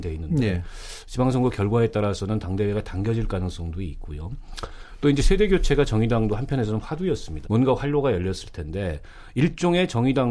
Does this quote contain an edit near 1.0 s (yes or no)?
no